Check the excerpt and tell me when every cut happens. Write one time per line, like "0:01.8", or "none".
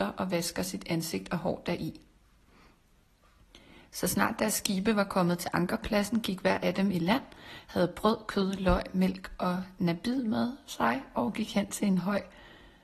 none